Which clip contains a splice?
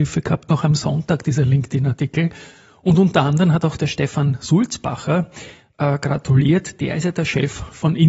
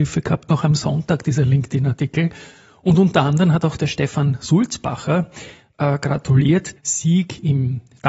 second; 1 cut; at 6.8 s

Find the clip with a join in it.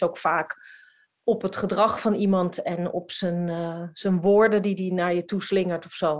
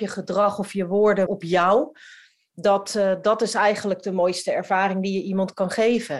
second; 1 cut; at 1.3 s

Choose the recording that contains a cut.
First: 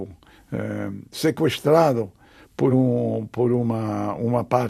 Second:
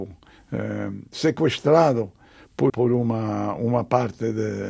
second; 1 cut; at 2.7 s

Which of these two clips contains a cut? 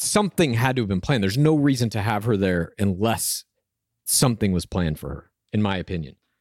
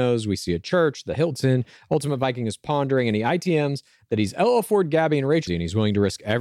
second; 1 cut; at 5.5 s

